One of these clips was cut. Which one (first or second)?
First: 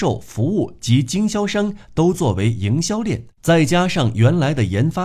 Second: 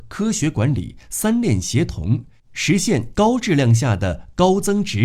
first